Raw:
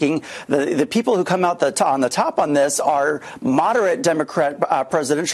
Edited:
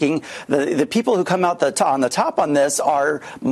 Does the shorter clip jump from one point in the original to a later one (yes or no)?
no